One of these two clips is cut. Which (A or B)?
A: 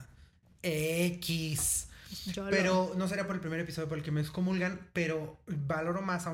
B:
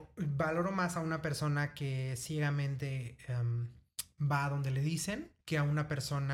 B